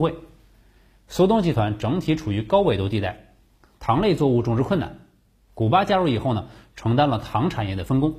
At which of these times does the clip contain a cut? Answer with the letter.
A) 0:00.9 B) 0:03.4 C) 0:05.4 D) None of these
D